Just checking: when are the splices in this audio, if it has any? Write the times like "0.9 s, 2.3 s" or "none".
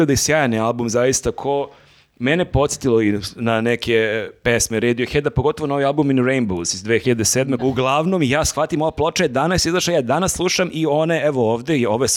7.6 s